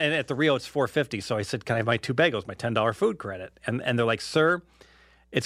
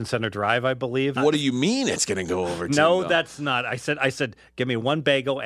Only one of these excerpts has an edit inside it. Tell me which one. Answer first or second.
second